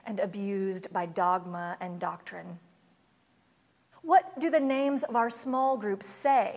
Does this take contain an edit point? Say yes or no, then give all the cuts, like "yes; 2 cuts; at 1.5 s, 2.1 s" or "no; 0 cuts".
yes; 1 cut; at 3.9 s